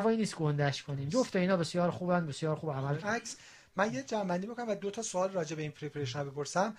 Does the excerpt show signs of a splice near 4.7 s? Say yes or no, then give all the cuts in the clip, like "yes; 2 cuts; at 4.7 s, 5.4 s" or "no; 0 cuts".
no; 1 cut; at 3.0 s